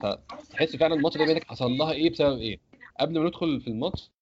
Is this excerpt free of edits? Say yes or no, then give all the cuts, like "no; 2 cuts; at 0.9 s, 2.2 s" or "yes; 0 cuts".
no; 1 cut; at 2.9 s